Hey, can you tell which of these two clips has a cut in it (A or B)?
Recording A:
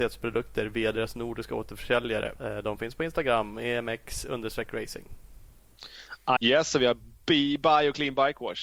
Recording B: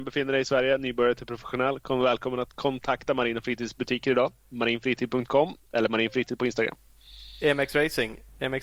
A